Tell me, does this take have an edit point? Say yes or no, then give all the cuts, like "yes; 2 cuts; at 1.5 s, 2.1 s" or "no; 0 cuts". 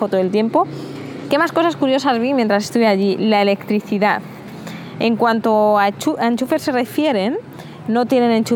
yes; 1 cut; at 1.3 s